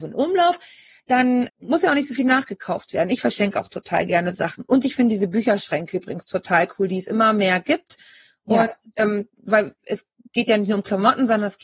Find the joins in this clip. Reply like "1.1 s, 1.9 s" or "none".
1.5 s